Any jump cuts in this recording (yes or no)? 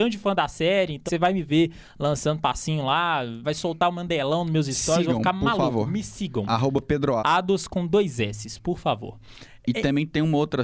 yes